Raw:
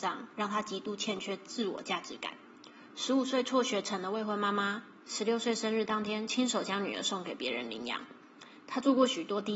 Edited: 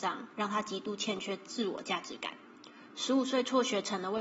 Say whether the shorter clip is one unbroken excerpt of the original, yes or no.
yes